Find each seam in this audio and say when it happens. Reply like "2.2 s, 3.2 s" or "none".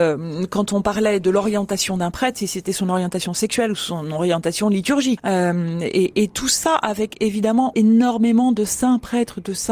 5.2 s, 7.7 s